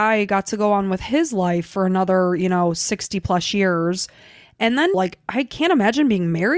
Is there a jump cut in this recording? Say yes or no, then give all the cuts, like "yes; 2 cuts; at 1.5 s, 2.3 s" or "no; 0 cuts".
yes; 1 cut; at 4.9 s